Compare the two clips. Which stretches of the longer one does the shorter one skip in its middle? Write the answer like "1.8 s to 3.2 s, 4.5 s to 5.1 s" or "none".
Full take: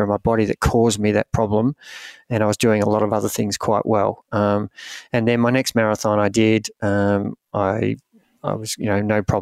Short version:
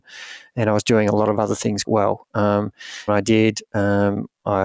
3.6 s to 3.8 s, 5.1 s to 6.2 s